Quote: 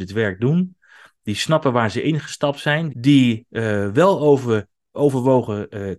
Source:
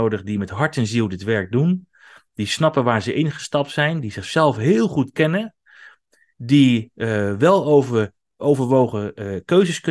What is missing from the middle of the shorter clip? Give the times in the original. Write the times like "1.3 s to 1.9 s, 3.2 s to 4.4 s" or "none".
4.0 s to 6.3 s